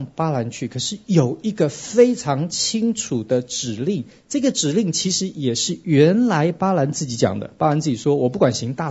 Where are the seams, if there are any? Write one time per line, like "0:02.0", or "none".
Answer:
none